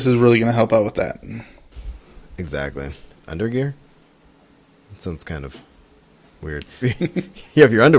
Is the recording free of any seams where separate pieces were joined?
no; 2 cuts; at 3.1 s, 6.8 s

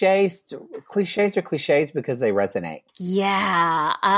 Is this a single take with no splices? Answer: no; 1 cut; at 2.9 s

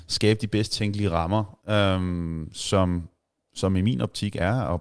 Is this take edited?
yes; 1 cut; at 1.6 s

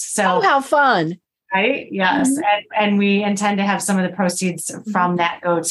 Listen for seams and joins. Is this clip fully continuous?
yes; 0 cuts

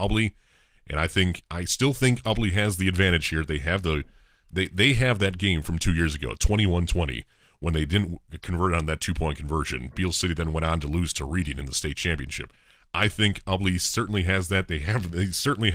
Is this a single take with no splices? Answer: yes; 0 cuts

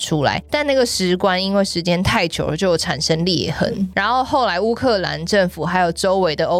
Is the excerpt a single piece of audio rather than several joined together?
yes; 0 cuts

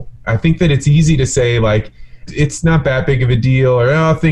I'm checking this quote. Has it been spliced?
yes; 1 cut; at 2.3 s

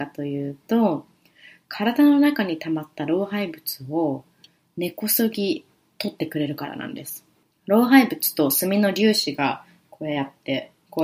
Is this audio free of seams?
yes; 0 cuts

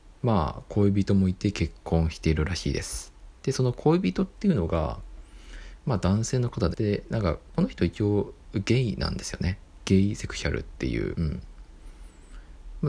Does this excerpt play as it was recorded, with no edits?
no; 2 cuts; at 6.7 s, 11.1 s

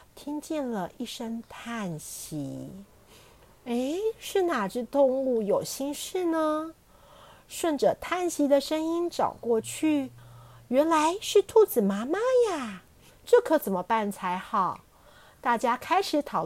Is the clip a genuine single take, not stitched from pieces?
no; 1 cut; at 13.1 s

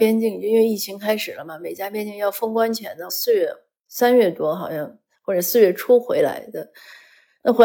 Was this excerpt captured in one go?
no; 1 cut; at 3.1 s

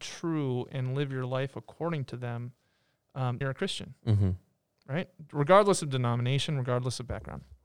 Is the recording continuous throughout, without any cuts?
no; 1 cut; at 3.4 s

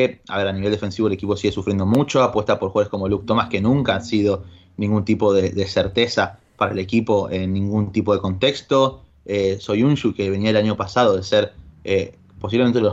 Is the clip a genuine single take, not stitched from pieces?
yes; 0 cuts

